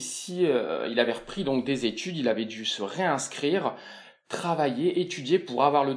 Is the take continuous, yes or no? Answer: yes